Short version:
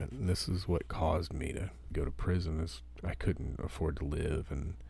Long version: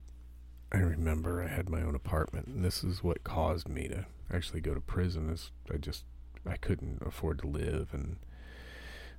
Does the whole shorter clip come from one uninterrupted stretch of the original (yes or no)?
no